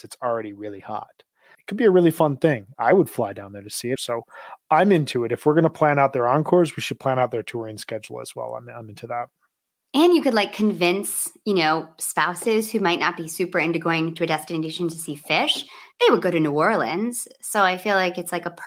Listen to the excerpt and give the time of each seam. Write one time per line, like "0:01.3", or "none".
0:01.5
0:04.0